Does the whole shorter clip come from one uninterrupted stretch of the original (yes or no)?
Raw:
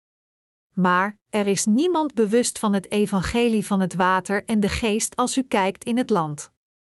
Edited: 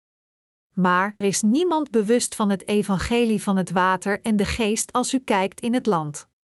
no